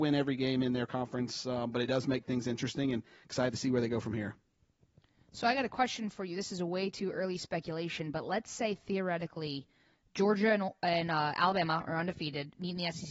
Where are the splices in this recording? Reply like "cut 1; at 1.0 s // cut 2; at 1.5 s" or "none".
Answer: none